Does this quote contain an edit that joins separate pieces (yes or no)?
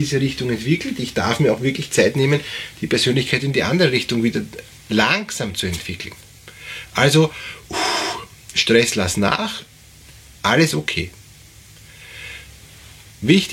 no